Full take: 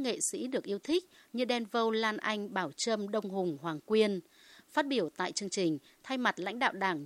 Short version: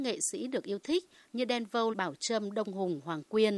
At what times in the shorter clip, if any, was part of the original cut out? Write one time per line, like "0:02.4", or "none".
0:01.9